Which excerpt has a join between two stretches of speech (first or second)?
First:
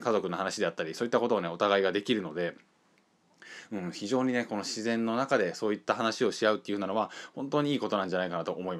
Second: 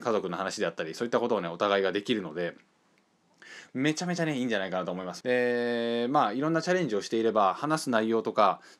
second